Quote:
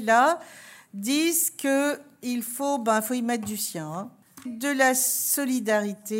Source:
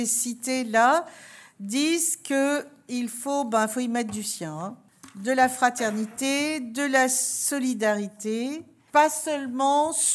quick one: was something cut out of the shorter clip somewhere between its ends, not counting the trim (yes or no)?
yes